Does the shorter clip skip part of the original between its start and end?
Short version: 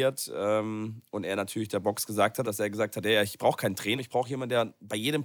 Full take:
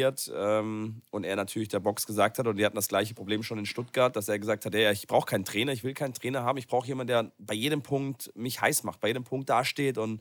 yes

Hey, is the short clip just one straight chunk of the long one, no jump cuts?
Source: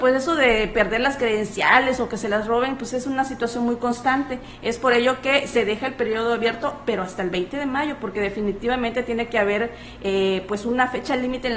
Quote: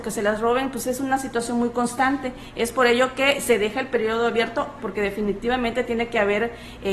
no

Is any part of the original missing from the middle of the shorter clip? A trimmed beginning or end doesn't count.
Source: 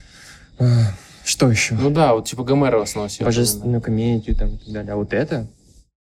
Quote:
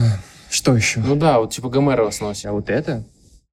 yes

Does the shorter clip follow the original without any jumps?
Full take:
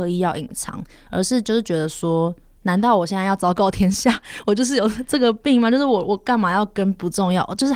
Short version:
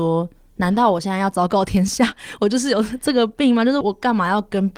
no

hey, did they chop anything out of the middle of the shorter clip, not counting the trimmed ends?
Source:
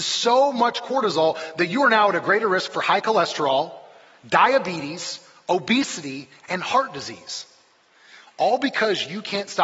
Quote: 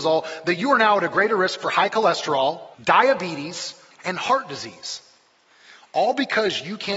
yes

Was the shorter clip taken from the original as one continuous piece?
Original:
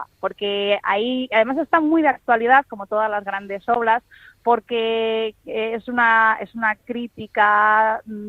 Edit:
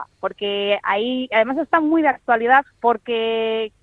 no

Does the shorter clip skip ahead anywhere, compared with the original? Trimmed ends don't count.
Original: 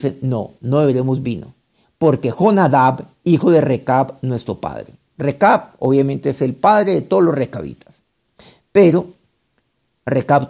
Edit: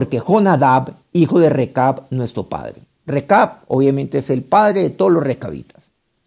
no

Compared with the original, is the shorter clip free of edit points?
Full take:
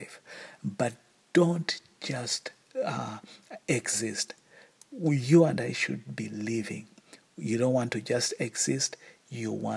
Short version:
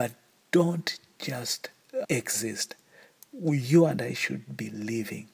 no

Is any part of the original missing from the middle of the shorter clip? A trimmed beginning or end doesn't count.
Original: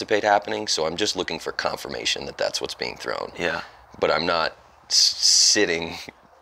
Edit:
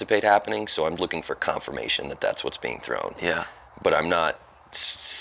yes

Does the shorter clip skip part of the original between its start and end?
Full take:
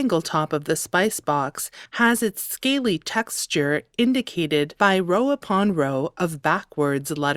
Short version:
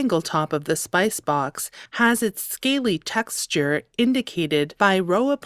no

